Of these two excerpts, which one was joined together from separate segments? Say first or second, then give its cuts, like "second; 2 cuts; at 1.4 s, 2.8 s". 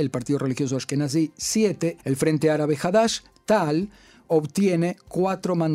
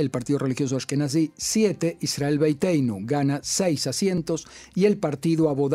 first; 1 cut; at 2.0 s